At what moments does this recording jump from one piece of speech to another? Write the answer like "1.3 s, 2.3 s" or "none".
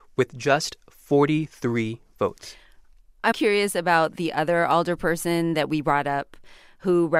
3.3 s